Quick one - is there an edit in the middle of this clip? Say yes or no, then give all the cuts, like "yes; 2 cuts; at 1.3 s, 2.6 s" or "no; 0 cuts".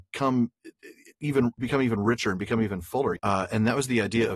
yes; 1 cut; at 3.2 s